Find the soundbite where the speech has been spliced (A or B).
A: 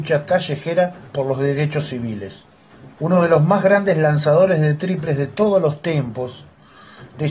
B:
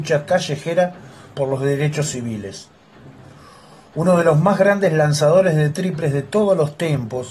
A